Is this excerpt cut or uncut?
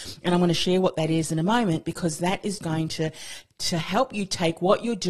cut